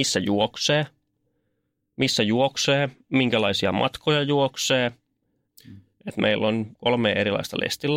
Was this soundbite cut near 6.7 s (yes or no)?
yes